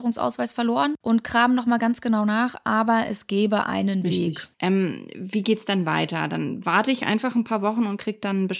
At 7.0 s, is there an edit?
no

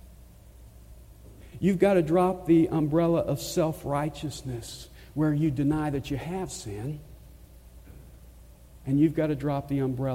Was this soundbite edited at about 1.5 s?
yes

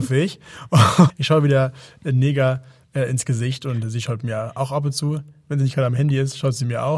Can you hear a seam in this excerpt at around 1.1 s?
yes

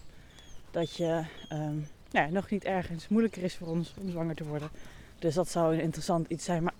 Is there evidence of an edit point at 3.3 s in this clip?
no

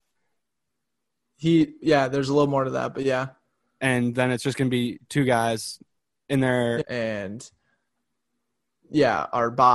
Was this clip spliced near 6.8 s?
yes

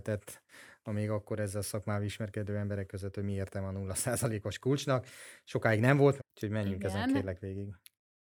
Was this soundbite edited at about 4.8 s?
no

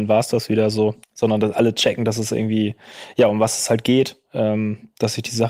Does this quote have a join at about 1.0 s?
yes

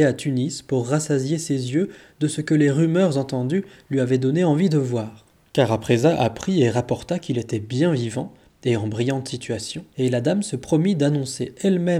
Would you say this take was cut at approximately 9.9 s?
yes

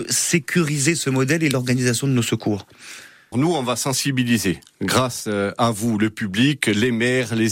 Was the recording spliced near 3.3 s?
yes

